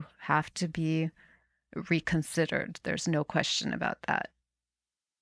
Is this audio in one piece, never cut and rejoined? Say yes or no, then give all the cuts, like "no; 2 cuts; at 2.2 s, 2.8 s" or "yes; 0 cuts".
yes; 0 cuts